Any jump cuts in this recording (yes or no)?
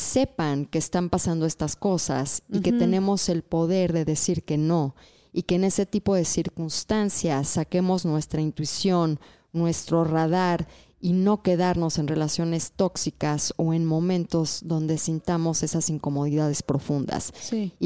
no